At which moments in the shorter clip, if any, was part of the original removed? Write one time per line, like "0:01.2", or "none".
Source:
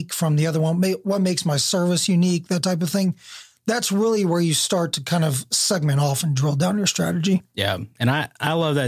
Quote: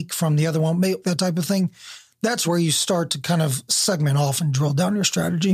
0:01.0
0:02.4